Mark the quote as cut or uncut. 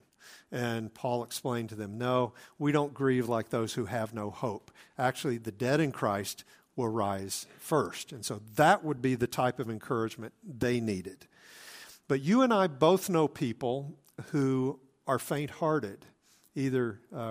uncut